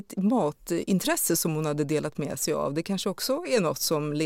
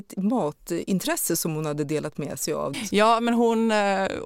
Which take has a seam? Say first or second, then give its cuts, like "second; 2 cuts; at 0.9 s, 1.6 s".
second; 1 cut; at 2.7 s